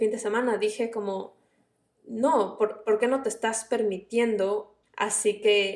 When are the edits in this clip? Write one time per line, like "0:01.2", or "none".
0:04.8